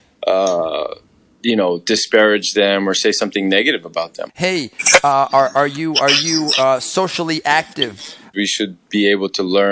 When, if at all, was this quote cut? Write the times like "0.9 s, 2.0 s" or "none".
4.3 s, 8.3 s